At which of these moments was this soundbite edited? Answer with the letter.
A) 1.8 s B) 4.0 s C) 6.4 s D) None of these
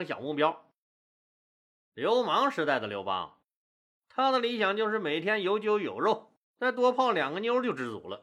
C